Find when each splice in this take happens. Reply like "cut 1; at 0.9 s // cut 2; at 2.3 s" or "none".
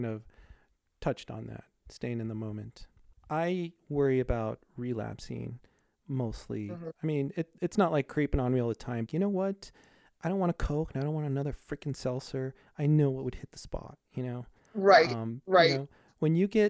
cut 1; at 9.1 s